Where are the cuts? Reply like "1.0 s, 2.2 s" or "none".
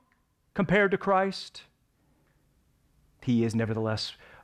none